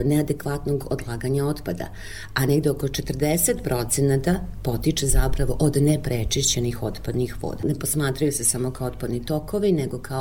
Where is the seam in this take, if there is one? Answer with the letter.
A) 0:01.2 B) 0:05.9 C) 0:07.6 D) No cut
C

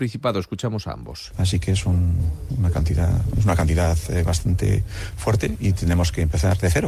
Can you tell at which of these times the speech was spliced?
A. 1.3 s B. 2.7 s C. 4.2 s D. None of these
A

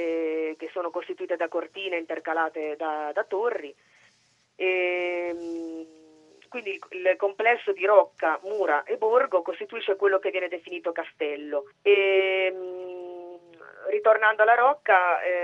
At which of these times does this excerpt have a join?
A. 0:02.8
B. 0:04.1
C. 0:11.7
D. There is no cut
C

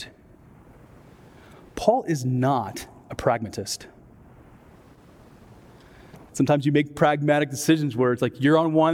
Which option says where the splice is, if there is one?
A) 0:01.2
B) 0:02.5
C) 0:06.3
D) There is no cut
C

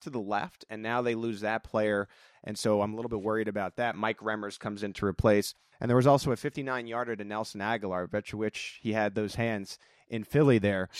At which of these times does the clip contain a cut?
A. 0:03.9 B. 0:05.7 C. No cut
B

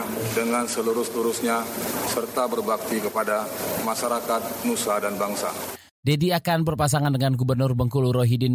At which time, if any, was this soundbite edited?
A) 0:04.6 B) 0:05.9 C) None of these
B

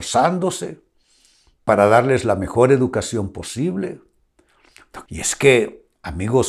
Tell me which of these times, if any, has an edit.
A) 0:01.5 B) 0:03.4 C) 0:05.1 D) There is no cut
C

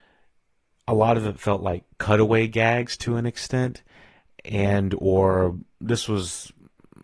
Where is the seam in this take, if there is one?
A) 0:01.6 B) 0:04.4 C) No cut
C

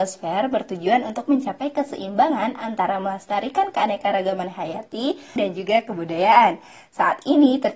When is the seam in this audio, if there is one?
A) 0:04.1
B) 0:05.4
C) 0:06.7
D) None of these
B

